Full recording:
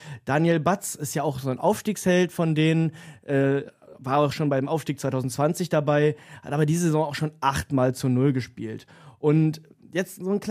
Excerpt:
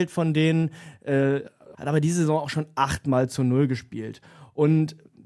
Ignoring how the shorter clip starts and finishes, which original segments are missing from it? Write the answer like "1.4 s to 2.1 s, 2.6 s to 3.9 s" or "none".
4.0 s to 6.4 s